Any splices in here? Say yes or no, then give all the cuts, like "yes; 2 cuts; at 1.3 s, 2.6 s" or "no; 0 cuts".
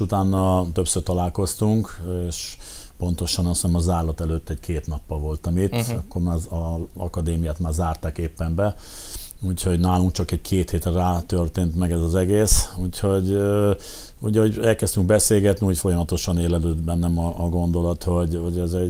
no; 0 cuts